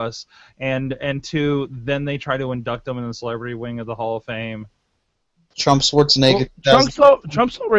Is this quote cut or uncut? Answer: uncut